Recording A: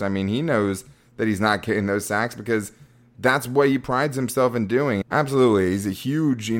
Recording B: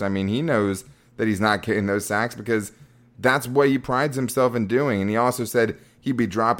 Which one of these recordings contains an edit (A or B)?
A